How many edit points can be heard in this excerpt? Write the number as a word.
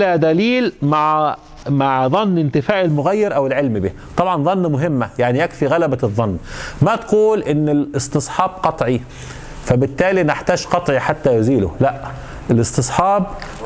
one